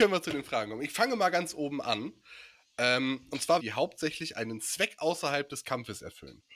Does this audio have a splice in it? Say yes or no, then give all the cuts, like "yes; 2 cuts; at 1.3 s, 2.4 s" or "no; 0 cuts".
yes; 1 cut; at 3.6 s